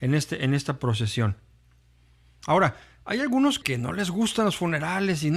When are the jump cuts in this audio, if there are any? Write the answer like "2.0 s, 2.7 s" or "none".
3.6 s